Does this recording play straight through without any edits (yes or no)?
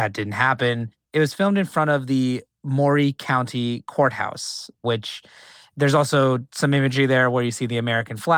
no